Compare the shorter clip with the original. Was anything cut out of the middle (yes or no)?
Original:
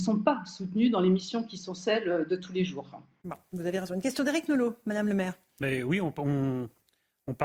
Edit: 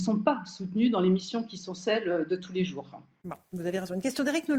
no